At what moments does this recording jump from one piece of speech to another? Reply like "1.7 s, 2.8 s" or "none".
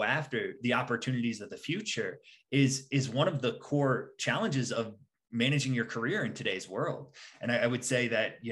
none